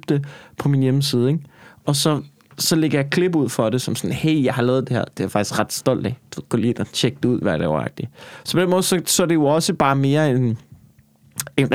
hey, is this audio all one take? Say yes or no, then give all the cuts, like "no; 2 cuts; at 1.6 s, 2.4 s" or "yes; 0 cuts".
no; 1 cut; at 7.4 s